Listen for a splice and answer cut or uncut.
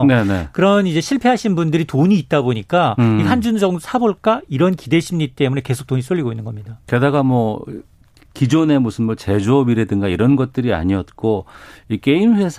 uncut